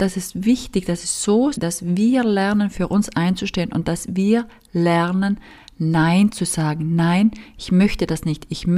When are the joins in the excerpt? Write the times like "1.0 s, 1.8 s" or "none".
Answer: 1.5 s

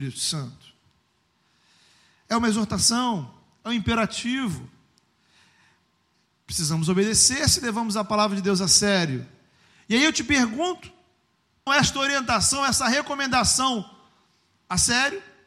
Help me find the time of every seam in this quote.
11.7 s

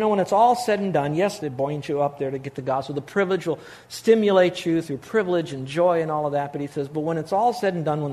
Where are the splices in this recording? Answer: 1.4 s

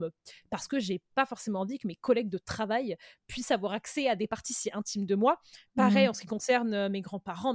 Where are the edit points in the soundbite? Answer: none

